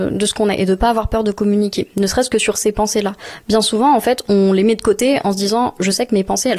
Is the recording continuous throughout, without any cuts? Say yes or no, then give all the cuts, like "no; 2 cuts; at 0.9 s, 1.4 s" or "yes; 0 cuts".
yes; 0 cuts